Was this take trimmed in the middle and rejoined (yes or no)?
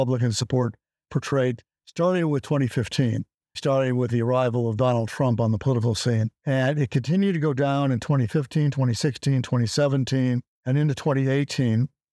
yes